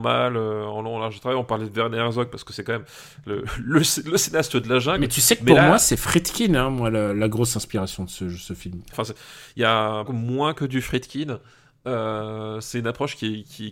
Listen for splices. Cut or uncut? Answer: cut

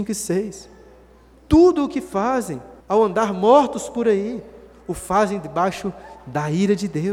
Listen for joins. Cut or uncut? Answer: cut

